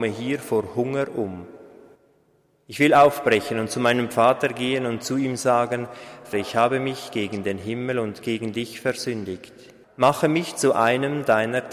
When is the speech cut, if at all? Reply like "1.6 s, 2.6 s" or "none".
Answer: 6.3 s, 9.8 s

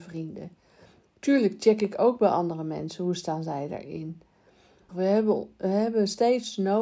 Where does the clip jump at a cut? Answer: 4.9 s

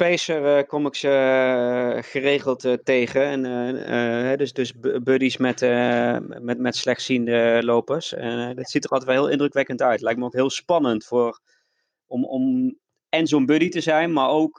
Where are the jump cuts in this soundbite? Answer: none

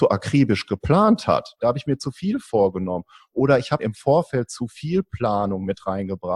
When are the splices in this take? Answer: 1.6 s, 3.8 s

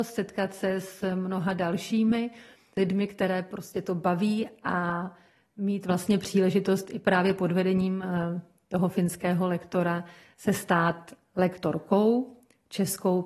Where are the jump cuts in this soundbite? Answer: none

